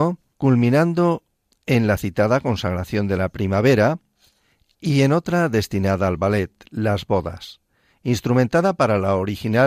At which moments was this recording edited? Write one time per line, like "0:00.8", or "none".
none